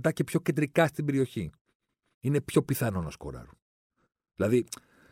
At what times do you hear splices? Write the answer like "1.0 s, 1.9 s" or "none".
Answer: 2.1 s